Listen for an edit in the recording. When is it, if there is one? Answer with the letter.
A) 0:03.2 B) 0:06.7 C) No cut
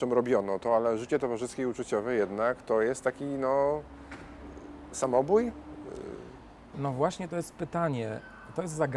B